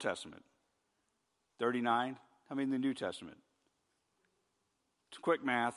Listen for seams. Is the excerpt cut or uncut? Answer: uncut